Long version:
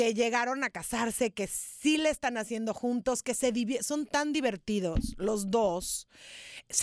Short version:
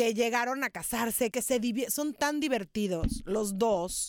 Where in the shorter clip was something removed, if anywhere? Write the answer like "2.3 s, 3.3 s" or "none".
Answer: 1.3 s